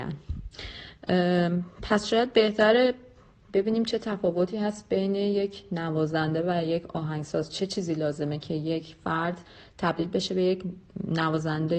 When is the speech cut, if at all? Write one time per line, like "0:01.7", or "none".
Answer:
none